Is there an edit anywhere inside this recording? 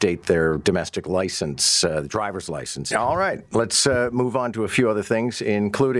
yes; 1 cut; at 2.9 s

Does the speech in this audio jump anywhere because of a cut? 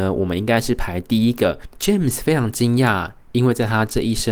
yes; 1 cut; at 1.7 s

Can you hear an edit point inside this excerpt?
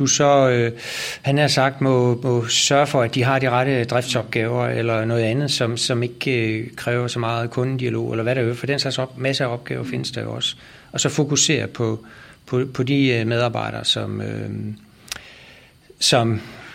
no; 0 cuts

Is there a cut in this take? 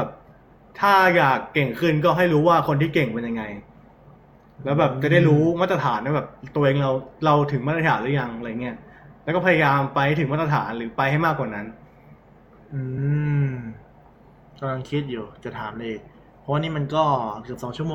no; 0 cuts

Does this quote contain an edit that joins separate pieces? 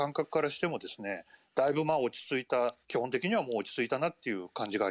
yes; 1 cut; at 2.8 s

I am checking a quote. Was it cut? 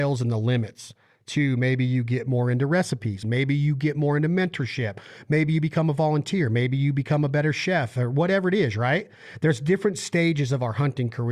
yes; 1 cut; at 3.2 s

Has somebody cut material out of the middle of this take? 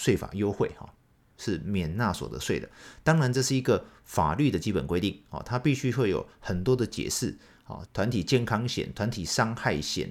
yes; 2 cuts; at 1.3 s, 7.9 s

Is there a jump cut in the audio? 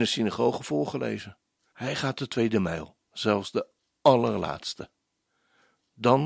yes; 2 cuts; at 1.7 s, 3.0 s

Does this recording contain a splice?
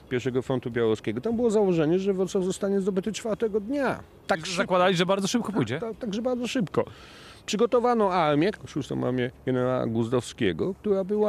no; 0 cuts

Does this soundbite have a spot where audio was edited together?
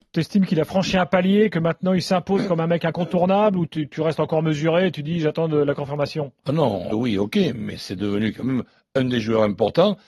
yes; 2 cuts; at 3.7 s, 6.9 s

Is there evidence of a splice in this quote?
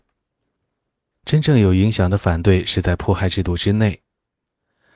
yes; 1 cut; at 1.1 s

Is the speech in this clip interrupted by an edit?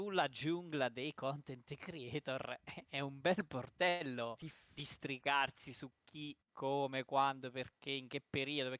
yes; 1 cut; at 6.4 s

